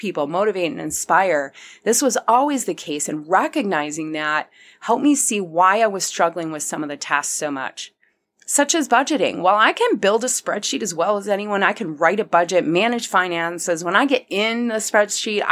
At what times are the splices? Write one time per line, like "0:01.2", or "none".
none

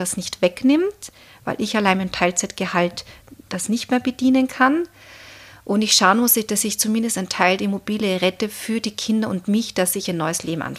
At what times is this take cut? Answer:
none

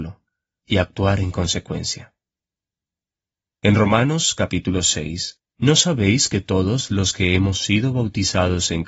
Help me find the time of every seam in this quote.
0:05.5

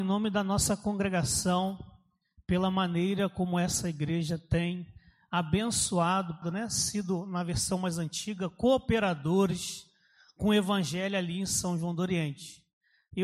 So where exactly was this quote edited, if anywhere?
0:06.4

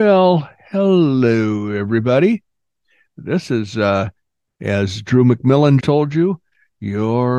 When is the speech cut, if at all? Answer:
0:05.8

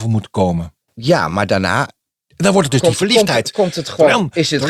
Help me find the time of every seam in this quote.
none

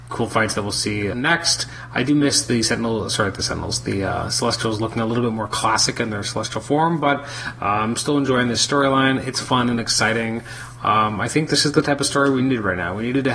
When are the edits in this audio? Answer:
0:01.1

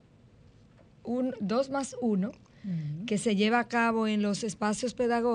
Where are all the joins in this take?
none

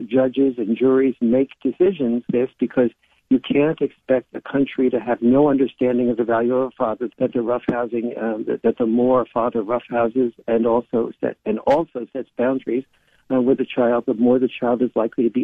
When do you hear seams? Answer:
0:02.3
0:07.1

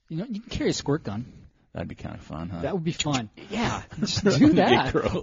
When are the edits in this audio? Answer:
0:03.4

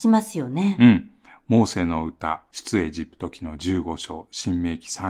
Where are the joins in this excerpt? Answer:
none

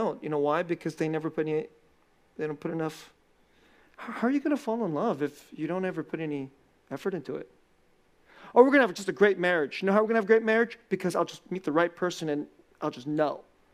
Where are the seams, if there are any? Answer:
none

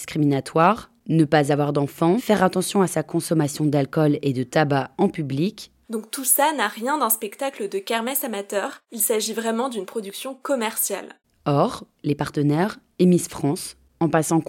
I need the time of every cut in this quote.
0:02.2
0:05.8
0:12.0

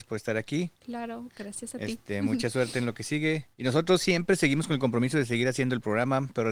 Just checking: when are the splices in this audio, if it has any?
0:03.5

